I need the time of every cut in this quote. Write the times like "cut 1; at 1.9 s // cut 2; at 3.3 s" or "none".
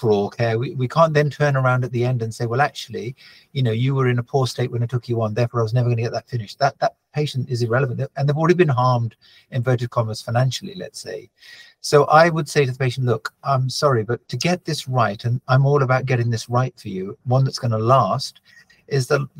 cut 1; at 14.2 s // cut 2; at 17.2 s